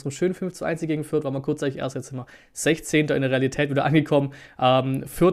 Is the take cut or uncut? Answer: uncut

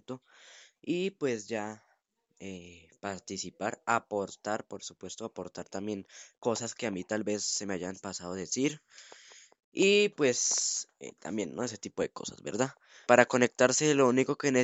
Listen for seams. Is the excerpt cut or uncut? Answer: cut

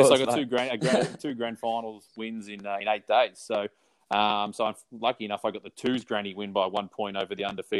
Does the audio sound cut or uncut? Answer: cut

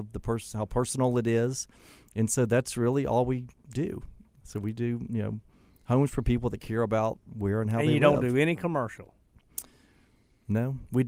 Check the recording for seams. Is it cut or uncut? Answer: uncut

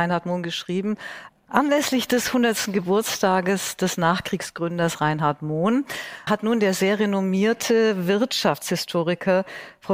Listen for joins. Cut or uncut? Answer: cut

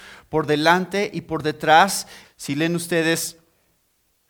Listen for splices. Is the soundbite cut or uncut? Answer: cut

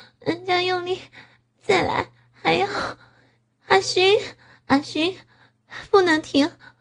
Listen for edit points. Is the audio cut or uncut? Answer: uncut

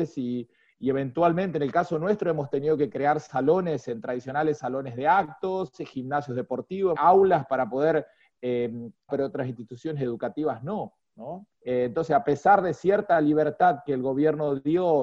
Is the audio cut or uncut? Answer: cut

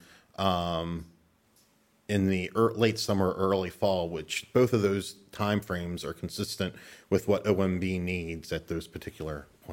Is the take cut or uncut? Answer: uncut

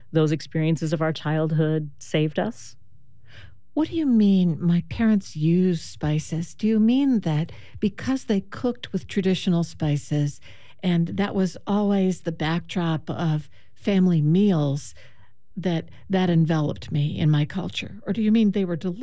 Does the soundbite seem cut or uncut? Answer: uncut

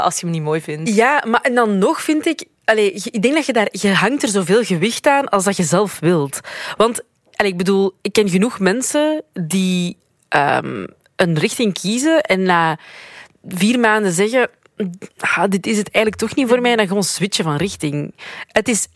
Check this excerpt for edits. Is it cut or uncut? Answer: uncut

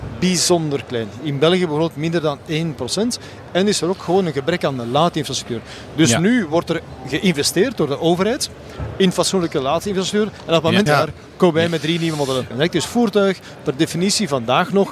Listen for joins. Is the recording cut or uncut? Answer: cut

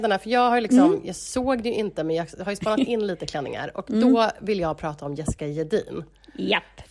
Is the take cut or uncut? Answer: uncut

